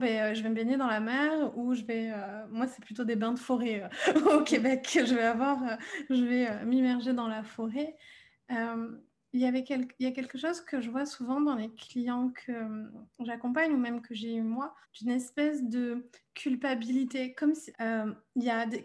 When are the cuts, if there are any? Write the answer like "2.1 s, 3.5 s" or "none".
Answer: 14.8 s, 17.7 s